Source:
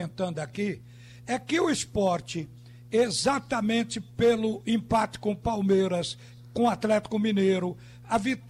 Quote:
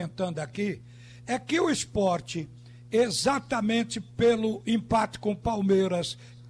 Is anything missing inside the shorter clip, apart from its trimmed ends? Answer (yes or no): no